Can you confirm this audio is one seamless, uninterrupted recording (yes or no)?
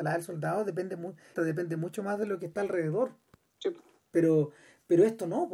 no